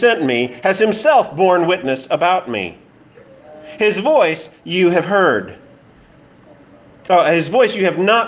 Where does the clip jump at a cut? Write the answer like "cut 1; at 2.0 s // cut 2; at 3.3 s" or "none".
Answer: none